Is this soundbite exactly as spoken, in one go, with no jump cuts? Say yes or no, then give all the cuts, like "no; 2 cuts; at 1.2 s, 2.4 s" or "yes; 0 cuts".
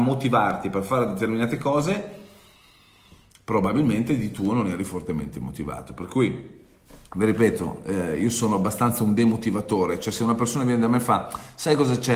yes; 0 cuts